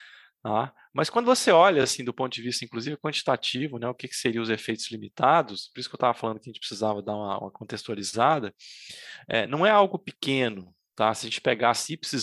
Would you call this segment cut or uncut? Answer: uncut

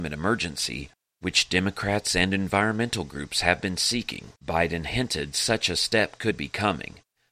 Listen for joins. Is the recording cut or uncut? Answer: cut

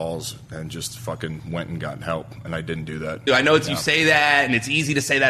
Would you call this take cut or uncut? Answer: cut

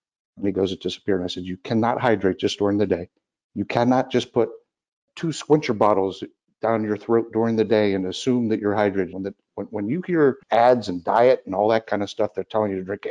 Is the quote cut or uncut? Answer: cut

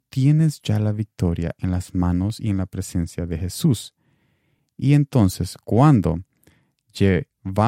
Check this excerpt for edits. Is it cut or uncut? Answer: uncut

